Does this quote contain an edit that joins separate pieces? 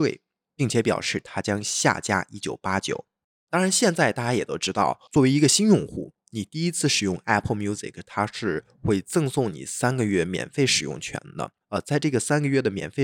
no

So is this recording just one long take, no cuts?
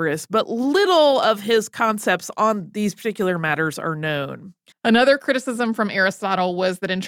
no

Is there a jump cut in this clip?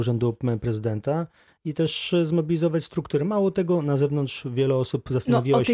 no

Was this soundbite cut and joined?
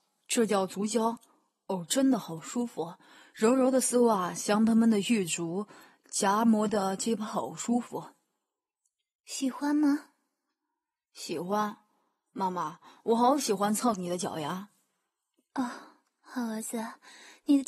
no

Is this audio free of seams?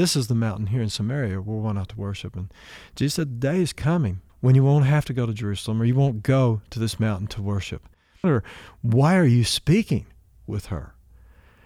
no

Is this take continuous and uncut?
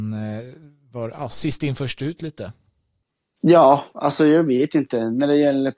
yes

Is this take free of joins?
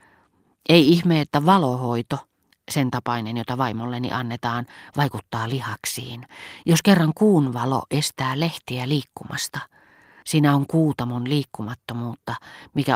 no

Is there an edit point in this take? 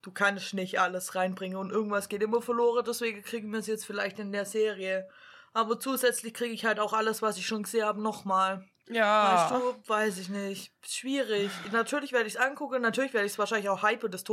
no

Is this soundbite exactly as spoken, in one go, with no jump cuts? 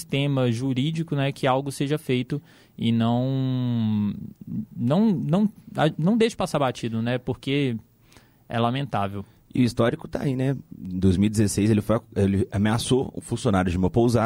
yes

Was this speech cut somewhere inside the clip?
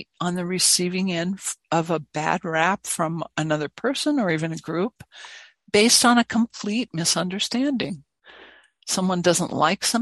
no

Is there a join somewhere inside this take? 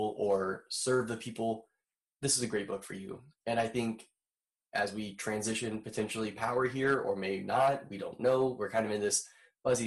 no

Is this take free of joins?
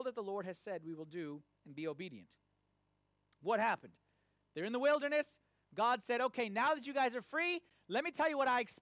yes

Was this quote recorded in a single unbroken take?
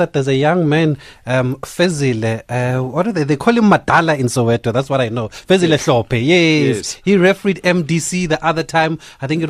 yes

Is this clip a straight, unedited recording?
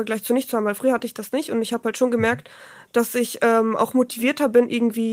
yes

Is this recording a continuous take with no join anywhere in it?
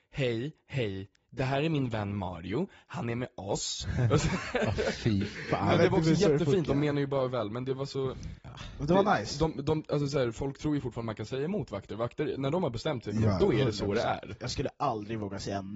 yes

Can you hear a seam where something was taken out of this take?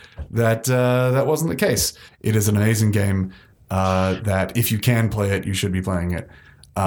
yes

